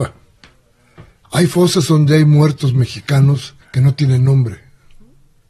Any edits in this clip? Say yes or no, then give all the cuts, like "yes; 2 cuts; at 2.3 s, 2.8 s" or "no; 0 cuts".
yes; 2 cuts; at 1.2 s, 3.6 s